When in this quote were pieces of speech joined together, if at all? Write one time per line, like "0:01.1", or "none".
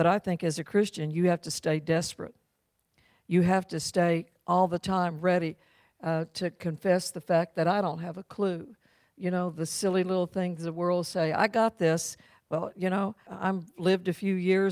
0:13.3